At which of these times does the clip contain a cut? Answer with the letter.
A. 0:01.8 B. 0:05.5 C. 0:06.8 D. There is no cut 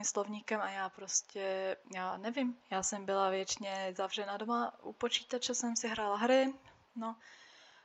A